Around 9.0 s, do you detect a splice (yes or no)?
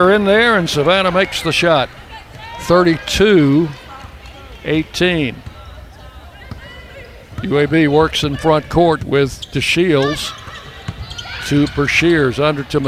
yes